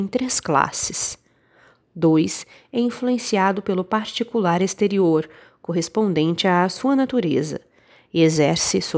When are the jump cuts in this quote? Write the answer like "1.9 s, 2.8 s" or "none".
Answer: 1.8 s